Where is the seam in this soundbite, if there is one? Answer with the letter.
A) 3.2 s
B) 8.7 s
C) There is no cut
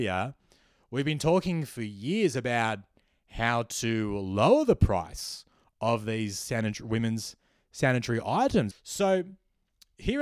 B